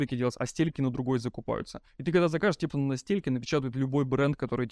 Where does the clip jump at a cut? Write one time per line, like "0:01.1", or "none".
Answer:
0:02.7

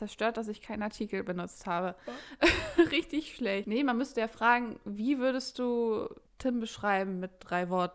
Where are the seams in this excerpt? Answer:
0:03.6
0:06.3

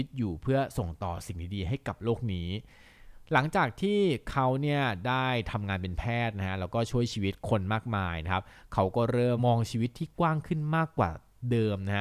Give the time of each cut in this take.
0:09.4

